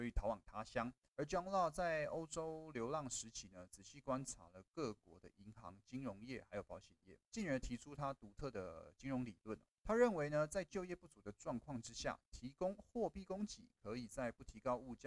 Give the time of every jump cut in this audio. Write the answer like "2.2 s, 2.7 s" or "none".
none